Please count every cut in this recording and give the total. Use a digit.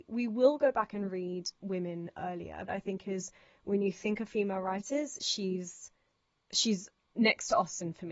1